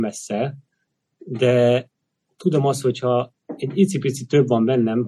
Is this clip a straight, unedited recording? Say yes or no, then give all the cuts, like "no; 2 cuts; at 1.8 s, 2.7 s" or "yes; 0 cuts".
yes; 0 cuts